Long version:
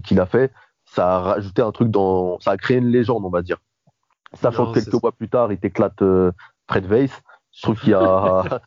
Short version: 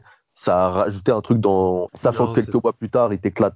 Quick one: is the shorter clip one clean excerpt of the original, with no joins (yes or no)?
no